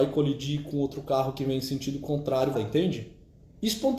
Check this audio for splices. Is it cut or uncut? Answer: cut